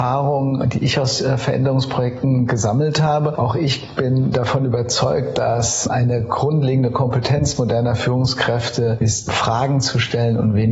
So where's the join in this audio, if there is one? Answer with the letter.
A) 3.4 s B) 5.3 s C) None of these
C